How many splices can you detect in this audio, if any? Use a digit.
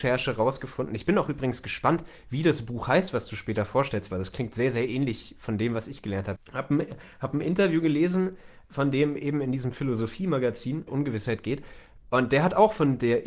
2